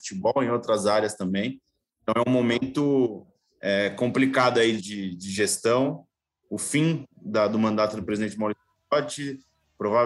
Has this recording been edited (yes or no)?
yes